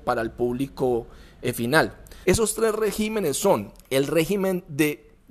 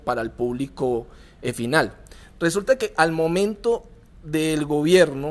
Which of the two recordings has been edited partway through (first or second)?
first